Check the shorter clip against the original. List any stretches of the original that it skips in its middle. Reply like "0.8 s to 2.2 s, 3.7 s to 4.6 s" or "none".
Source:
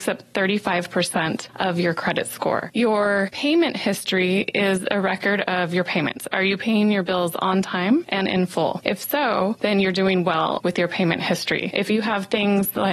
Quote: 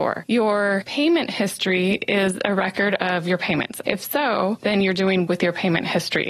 6.3 s to 8.8 s, 10.2 s to 10.6 s